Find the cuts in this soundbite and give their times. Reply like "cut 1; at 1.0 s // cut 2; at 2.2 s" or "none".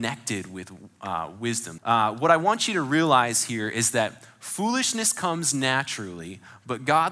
cut 1; at 1.8 s